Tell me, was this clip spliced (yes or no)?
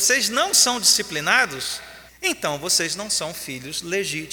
yes